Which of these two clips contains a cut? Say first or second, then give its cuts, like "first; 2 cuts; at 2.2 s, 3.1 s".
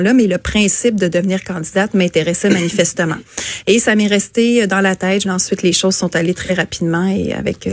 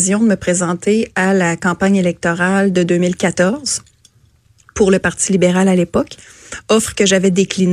first; 1 cut; at 5.2 s